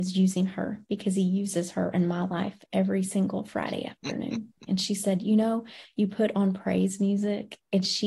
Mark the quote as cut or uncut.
cut